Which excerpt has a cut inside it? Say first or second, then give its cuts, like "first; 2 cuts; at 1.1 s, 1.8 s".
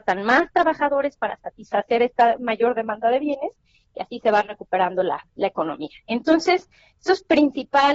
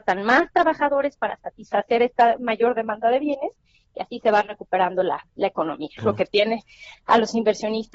second; 1 cut; at 6.0 s